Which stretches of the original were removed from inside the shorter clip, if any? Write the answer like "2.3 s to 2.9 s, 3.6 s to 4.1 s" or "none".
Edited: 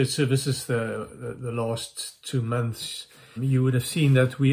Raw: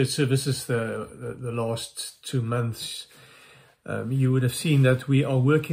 3.4 s to 4.0 s

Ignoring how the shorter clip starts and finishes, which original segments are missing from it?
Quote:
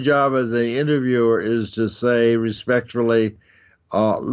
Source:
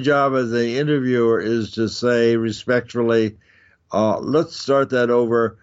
none

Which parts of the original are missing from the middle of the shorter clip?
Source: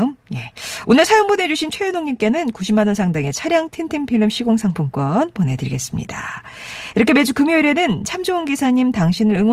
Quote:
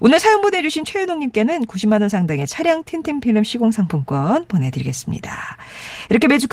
none

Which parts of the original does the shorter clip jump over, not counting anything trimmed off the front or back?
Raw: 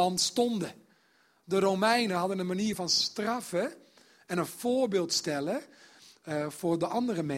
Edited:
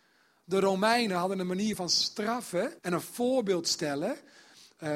3.8 s to 4.2 s

